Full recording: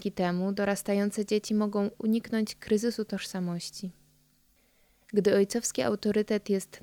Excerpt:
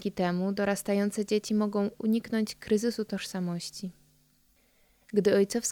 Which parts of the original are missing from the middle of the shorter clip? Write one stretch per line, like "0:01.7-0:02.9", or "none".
none